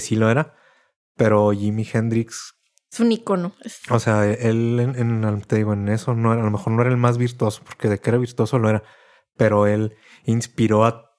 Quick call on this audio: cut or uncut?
uncut